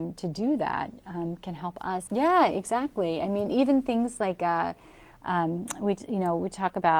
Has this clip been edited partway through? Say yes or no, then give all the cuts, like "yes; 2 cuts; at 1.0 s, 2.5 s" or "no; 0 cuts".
yes; 1 cut; at 2.1 s